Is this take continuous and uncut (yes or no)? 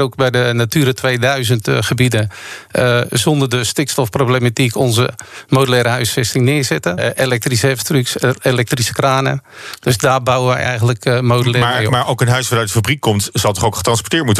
no